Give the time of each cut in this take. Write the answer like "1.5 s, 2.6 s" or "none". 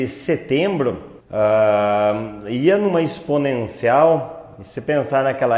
1.2 s